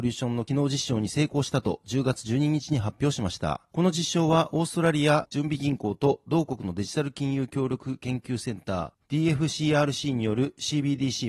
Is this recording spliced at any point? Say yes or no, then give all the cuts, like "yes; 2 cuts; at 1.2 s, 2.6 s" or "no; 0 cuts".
no; 0 cuts